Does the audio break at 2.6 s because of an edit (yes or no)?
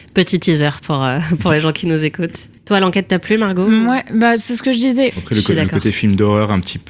yes